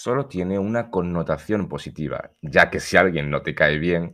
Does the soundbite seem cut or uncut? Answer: uncut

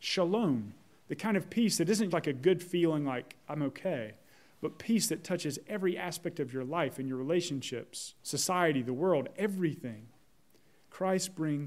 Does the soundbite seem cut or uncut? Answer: cut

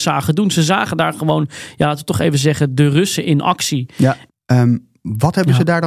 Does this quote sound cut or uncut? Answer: cut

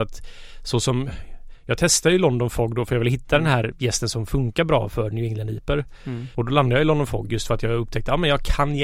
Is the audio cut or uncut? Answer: cut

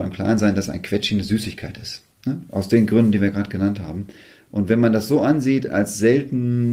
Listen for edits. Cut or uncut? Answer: uncut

